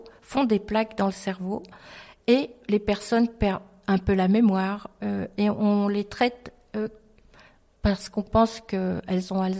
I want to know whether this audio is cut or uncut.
uncut